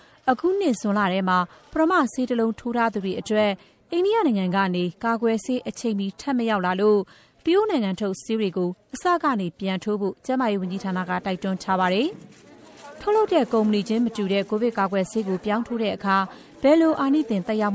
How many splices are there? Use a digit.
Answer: 0